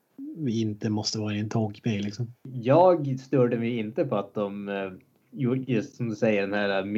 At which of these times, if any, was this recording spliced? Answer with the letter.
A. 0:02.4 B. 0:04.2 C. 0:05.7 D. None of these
D